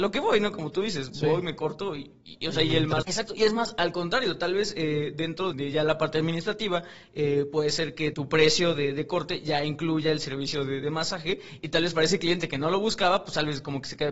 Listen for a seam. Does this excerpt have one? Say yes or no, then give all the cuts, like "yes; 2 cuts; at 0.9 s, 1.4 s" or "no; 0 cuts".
yes; 3 cuts; at 3.0 s, 5.5 s, 8.1 s